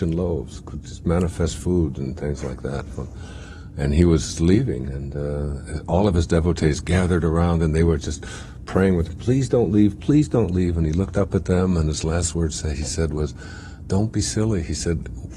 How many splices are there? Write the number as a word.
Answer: one